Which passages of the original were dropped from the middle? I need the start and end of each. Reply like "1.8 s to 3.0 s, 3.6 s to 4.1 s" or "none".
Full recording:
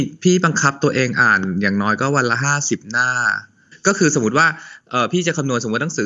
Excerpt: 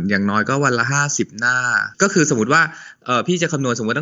3.5 s to 3.8 s